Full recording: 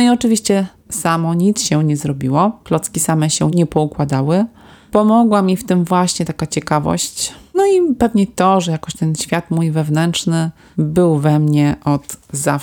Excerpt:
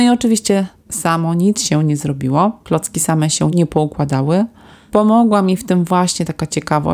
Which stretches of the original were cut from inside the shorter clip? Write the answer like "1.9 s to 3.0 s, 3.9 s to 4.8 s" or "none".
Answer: none